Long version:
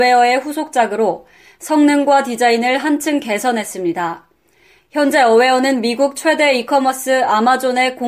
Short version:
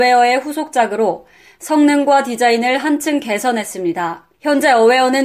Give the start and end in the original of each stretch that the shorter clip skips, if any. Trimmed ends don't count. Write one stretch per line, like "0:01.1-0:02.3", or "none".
0:04.3-0:04.8